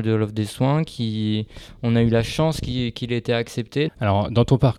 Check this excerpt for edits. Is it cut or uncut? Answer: cut